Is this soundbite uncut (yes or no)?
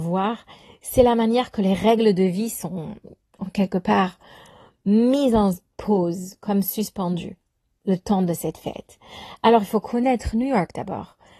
yes